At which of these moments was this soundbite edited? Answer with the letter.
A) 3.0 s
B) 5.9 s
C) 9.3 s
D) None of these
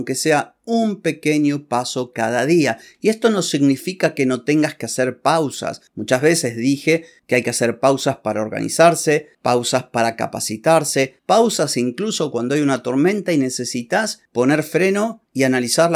D